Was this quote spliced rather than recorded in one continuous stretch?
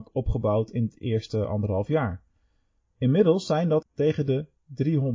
yes; 1 cut; at 3.8 s

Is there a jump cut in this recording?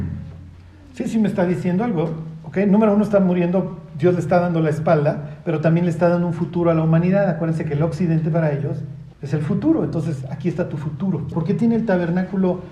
yes; 2 cuts; at 9.1 s, 11.3 s

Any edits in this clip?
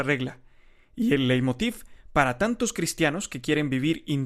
no; 0 cuts

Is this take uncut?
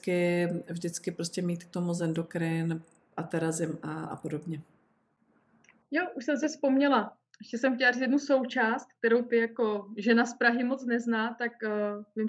yes; 0 cuts

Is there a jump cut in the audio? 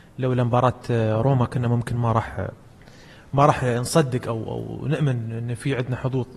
no; 0 cuts

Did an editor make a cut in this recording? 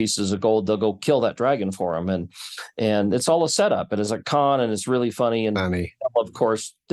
no; 0 cuts

